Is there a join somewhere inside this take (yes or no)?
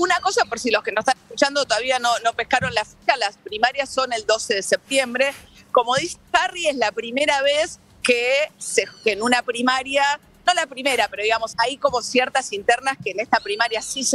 yes